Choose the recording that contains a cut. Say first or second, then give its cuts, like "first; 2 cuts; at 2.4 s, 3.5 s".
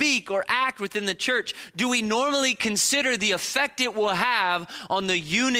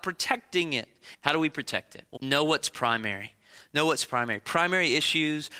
second; 2 cuts; at 1.1 s, 2.2 s